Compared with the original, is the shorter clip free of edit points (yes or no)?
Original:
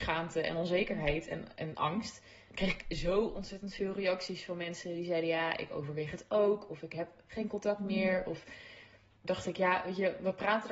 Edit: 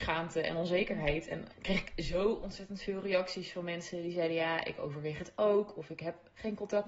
no